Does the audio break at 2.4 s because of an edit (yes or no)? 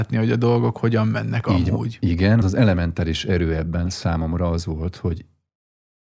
yes